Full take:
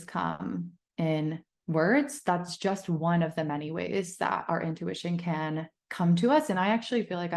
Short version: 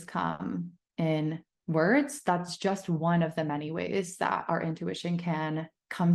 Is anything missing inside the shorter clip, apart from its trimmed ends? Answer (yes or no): no